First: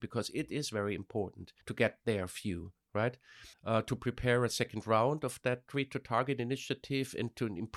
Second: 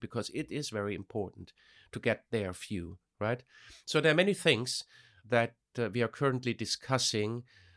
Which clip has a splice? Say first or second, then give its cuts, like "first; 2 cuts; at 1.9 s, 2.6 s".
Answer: first; 2 cuts; at 1.6 s, 3.5 s